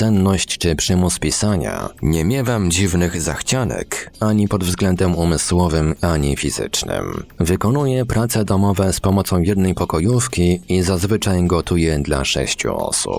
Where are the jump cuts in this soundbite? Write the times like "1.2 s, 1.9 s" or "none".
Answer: none